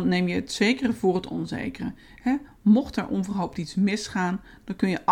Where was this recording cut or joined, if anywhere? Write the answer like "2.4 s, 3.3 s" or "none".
none